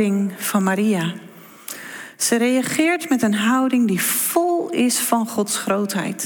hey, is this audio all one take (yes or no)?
yes